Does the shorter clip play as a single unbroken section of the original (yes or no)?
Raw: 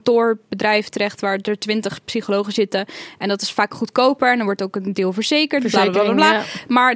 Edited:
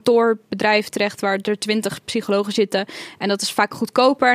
yes